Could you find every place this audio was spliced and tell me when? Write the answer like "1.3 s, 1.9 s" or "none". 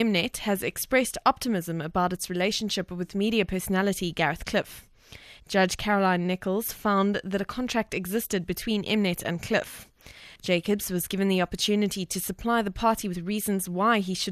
5.4 s, 10.4 s